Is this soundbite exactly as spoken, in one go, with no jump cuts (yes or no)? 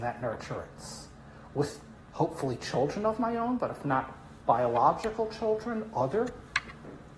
yes